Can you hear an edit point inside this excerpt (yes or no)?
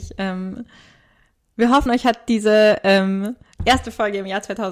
no